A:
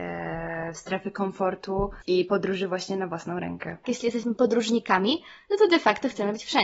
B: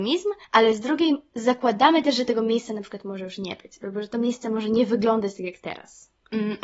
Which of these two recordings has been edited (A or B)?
A